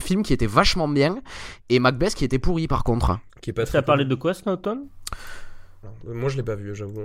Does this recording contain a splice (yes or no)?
yes